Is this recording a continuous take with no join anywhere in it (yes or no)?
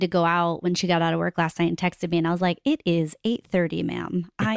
yes